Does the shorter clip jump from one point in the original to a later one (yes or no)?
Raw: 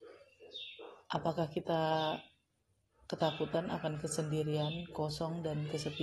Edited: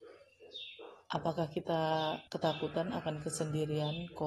yes